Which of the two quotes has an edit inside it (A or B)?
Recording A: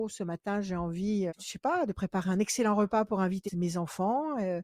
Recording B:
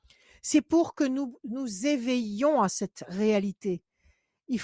A